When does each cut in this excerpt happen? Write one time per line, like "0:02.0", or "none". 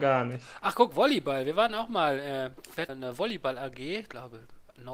0:02.9